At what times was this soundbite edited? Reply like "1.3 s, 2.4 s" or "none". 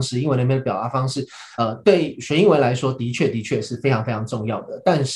none